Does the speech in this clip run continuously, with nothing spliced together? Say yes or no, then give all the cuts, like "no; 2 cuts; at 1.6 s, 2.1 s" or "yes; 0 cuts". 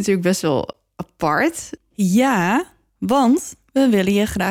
no; 1 cut; at 1.8 s